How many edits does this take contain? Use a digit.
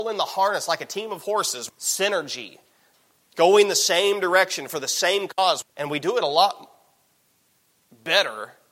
2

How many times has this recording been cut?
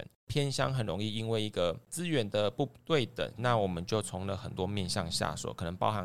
1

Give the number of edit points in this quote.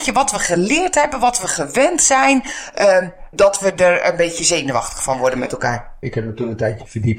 2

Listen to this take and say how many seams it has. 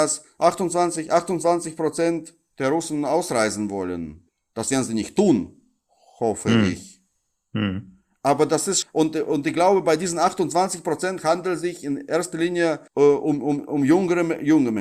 2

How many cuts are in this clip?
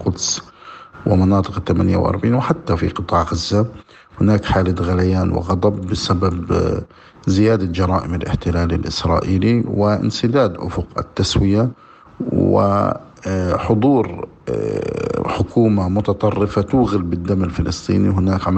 0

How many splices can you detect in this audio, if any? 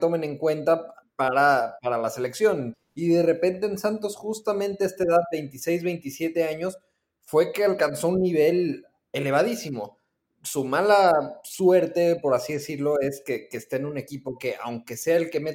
1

